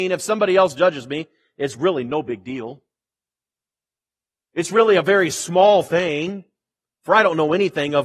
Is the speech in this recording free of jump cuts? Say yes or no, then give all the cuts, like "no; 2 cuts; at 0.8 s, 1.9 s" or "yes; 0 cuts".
yes; 0 cuts